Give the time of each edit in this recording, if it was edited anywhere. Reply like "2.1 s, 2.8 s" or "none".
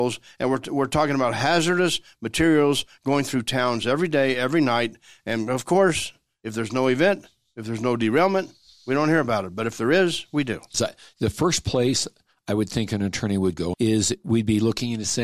10.7 s, 13.7 s